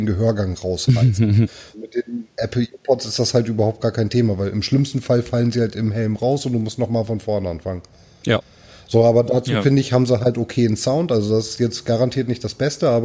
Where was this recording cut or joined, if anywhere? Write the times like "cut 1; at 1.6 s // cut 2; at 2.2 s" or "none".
cut 1; at 1.7 s